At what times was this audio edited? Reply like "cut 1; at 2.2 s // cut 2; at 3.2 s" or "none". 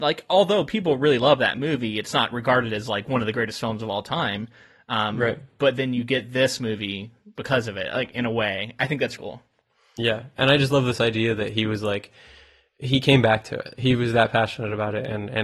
cut 1; at 9.2 s